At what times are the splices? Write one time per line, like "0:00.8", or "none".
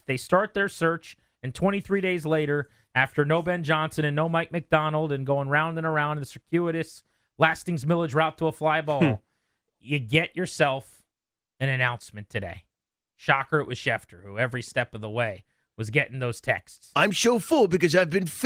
none